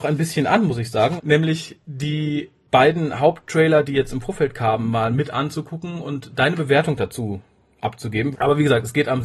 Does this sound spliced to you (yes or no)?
yes